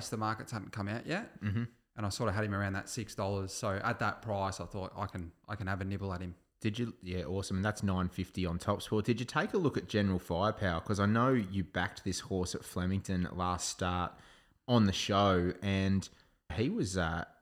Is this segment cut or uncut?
cut